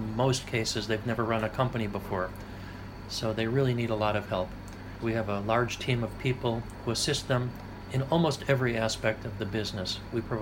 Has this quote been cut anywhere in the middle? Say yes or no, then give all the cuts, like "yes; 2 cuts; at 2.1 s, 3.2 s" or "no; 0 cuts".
yes; 1 cut; at 5.0 s